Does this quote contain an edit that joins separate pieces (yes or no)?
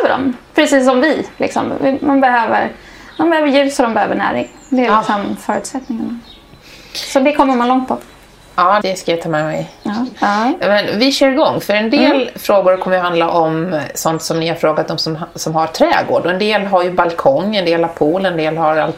yes